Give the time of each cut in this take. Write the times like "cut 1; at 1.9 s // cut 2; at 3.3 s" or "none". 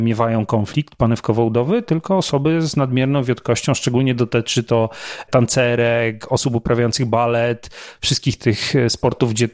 none